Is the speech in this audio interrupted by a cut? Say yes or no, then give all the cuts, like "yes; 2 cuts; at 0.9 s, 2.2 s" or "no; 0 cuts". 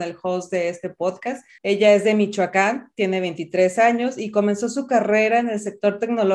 yes; 1 cut; at 1.6 s